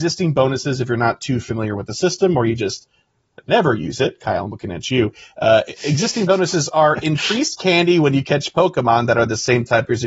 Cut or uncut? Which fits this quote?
uncut